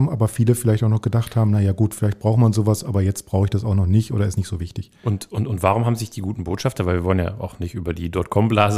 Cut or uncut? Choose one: uncut